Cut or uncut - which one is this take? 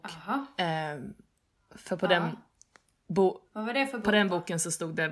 uncut